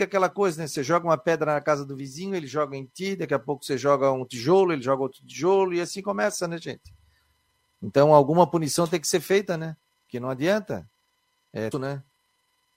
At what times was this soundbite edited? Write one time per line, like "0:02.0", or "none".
0:11.7

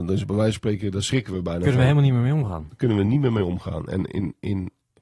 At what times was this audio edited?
none

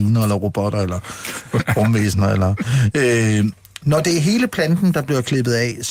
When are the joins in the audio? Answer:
none

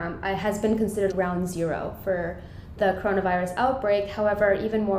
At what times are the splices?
0:01.1

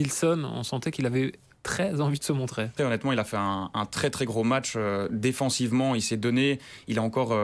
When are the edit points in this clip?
0:02.8

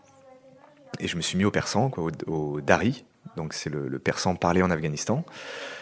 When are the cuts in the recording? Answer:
none

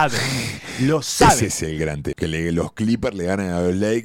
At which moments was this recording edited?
0:02.1

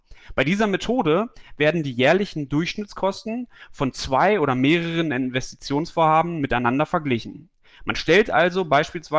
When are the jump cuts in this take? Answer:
none

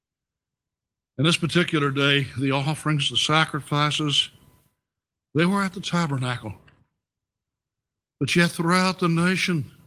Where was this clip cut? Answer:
none

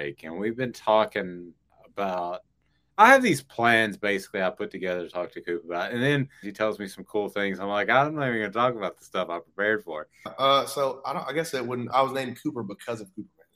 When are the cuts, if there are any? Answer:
0:06.4
0:10.3
0:11.9

